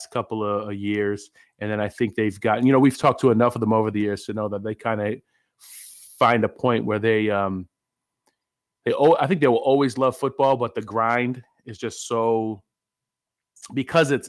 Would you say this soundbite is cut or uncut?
uncut